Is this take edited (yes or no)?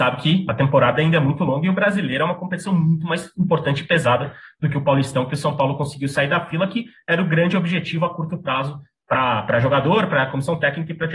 no